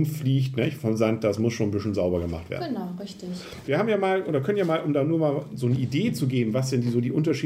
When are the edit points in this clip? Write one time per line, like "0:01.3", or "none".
none